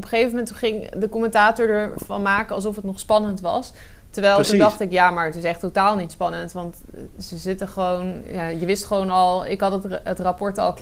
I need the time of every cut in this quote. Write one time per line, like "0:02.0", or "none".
none